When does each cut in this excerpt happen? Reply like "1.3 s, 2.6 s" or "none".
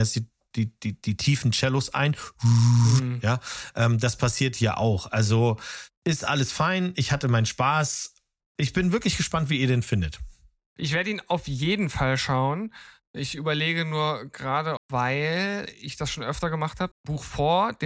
5.9 s, 14.8 s, 16.9 s